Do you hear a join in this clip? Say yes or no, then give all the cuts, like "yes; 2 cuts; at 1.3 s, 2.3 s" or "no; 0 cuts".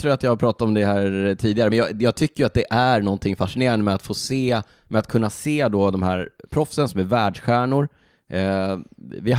no; 0 cuts